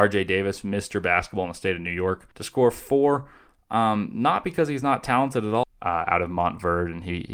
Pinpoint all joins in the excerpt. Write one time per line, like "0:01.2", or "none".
0:02.3
0:05.6

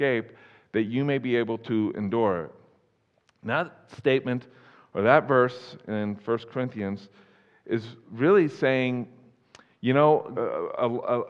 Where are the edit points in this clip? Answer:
0:10.4

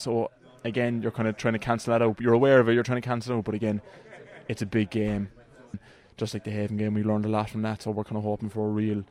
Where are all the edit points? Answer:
0:05.7

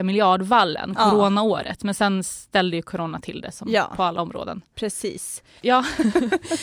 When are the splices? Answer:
0:05.6

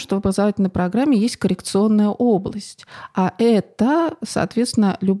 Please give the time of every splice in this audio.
none

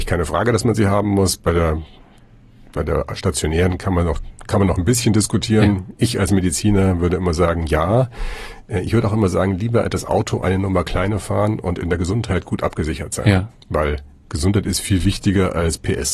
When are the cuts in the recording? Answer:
none

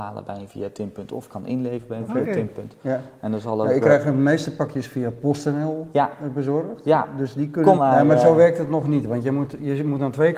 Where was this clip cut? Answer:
0:07.8

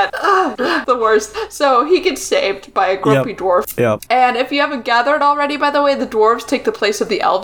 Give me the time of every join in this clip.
none

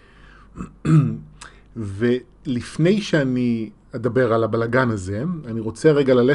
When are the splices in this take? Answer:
none

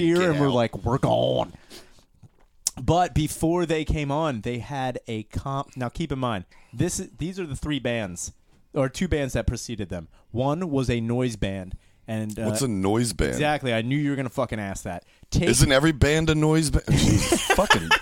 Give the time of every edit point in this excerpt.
none

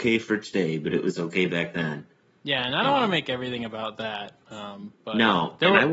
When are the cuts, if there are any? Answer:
none

